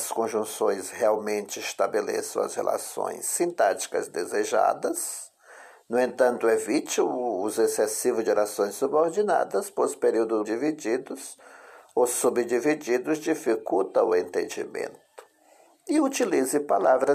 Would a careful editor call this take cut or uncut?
cut